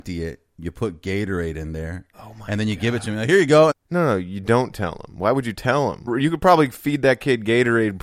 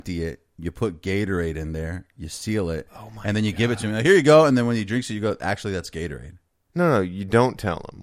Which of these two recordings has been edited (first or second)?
first